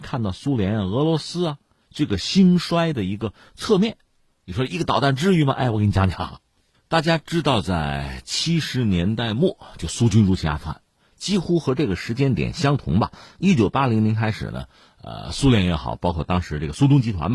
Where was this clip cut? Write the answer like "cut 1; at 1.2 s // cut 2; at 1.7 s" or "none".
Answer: none